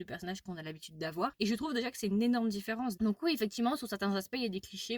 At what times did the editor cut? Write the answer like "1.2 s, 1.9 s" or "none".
3.0 s

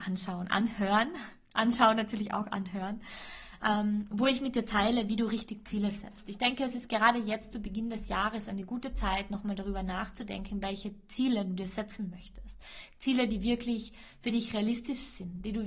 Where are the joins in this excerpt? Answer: none

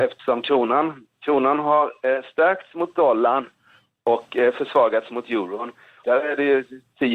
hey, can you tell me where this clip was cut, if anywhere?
6.0 s

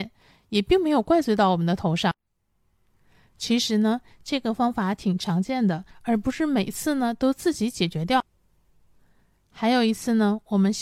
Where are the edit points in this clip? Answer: 5.9 s

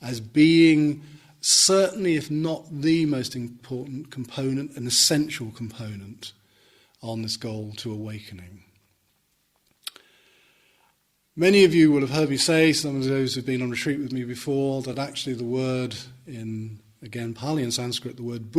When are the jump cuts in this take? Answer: none

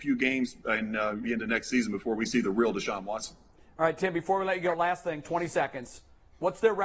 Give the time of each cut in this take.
1.2 s

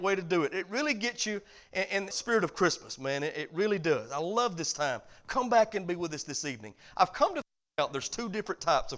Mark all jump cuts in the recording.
2.1 s

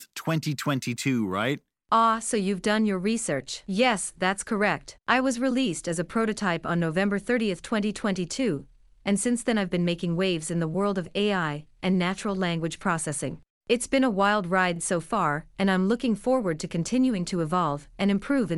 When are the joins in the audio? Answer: none

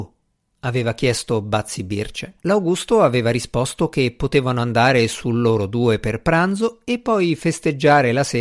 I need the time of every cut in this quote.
2.4 s

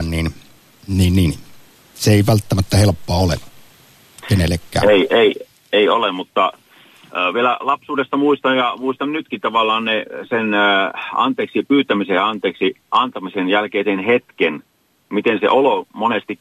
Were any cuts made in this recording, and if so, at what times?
12.8 s

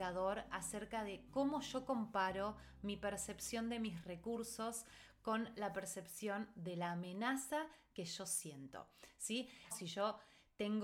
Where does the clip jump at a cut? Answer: 9.7 s

